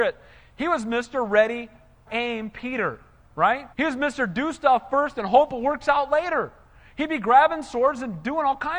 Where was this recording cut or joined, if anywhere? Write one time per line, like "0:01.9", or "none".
0:02.1
0:03.7